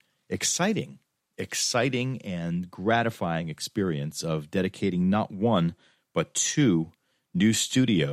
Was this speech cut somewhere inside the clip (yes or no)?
no